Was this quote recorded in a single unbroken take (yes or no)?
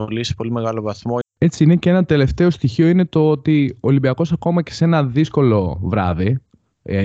no